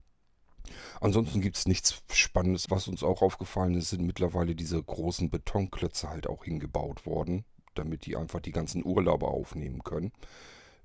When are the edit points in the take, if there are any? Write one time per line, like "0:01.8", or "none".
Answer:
0:02.6